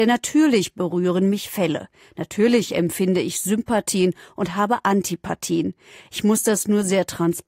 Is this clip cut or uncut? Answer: uncut